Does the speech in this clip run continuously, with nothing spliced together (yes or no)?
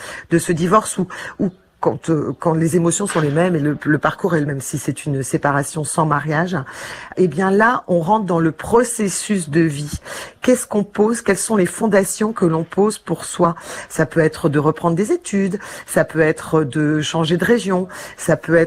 no